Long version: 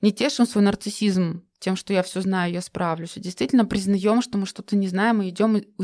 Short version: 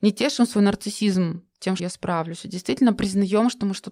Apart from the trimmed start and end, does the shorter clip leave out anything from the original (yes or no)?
yes